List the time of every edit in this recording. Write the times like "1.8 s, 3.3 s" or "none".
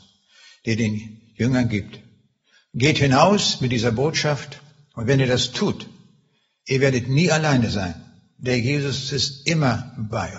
none